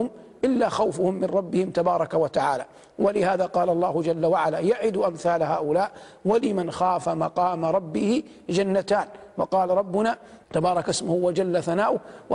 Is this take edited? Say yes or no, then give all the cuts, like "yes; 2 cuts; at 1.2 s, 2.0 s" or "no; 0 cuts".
yes; 1 cut; at 10.4 s